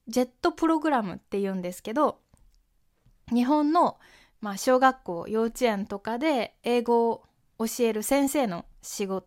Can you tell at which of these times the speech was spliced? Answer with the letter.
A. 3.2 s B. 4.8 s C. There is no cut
C